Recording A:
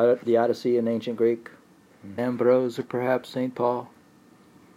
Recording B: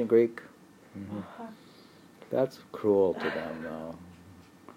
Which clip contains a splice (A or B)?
A